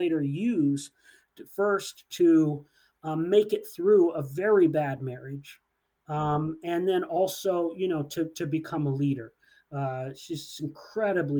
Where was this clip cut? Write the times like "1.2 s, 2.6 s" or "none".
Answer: none